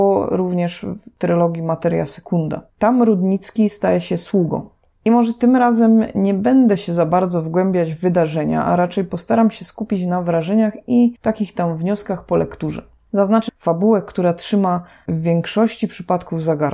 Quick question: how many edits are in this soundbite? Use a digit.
2